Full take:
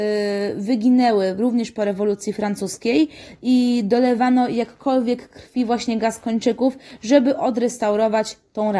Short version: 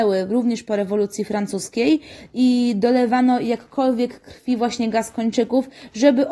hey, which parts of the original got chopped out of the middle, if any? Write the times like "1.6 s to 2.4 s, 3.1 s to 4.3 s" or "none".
none